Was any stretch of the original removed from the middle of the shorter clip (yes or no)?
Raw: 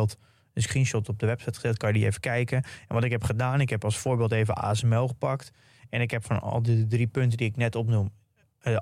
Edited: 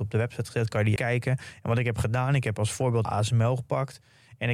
yes